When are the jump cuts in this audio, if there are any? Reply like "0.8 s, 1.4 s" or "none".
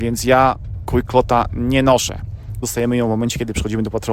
2.6 s

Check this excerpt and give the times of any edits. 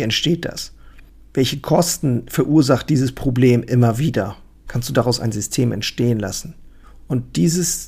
4.7 s

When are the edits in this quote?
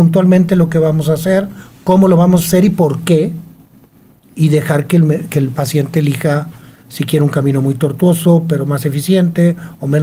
none

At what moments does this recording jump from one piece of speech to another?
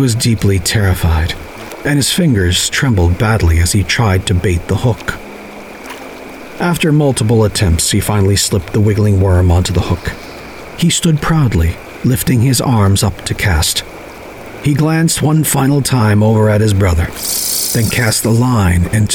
none

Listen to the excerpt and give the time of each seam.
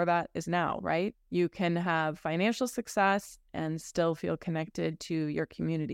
1.1 s

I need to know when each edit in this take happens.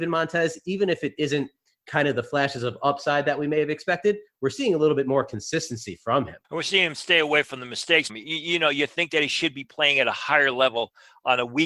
6.4 s, 8.1 s

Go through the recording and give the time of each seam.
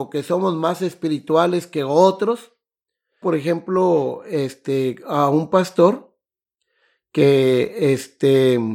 3.2 s

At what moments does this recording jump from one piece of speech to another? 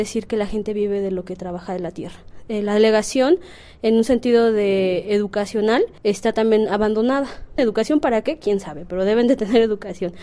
6.0 s, 7.6 s

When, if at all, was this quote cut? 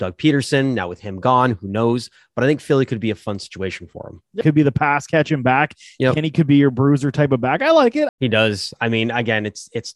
4.4 s, 8.1 s

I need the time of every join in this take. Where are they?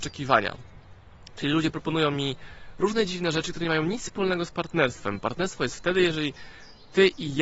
none

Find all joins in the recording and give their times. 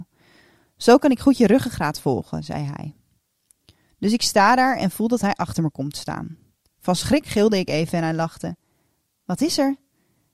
none

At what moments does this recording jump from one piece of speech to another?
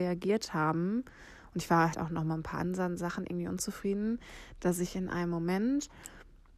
1.9 s

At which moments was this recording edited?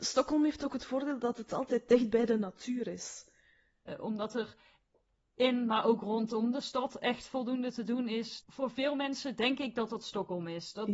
3.9 s, 8.4 s

